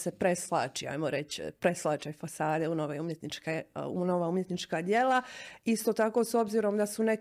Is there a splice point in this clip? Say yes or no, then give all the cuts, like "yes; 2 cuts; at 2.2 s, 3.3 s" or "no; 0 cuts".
no; 0 cuts